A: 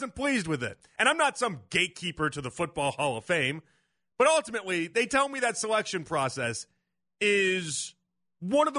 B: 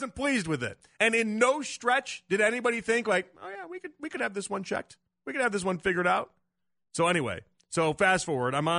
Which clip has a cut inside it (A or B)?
B